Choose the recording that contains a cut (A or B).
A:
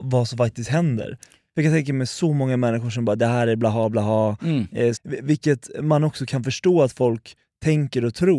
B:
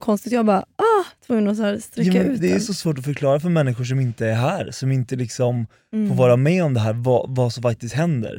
A